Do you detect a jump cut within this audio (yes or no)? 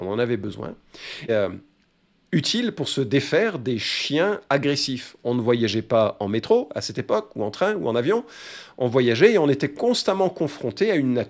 yes